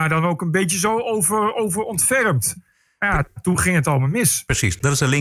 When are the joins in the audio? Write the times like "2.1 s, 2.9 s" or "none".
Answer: none

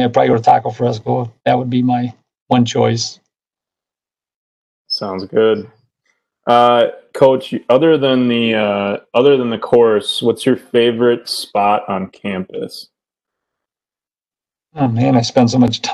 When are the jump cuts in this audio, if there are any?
none

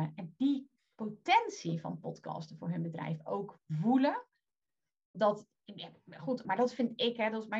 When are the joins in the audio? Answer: 5.1 s, 6.4 s

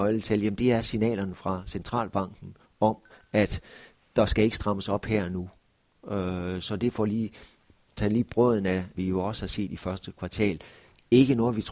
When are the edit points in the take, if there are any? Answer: 8.9 s

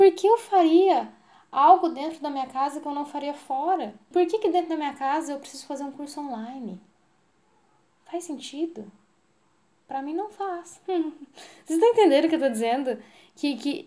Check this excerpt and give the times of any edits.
4.1 s

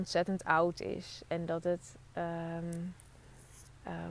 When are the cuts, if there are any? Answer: none

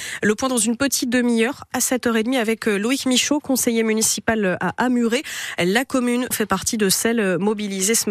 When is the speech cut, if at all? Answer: 6.3 s

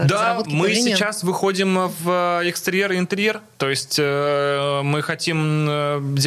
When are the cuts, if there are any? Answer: none

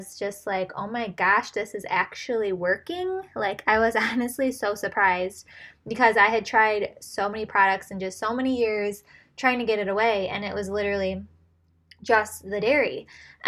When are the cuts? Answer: none

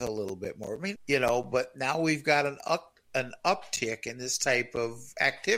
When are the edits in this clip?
1.0 s

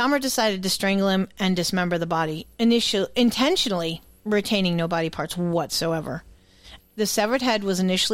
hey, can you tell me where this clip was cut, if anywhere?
2.5 s, 6.8 s

